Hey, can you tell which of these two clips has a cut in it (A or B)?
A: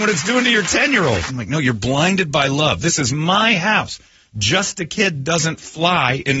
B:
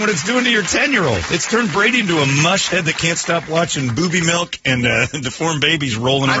A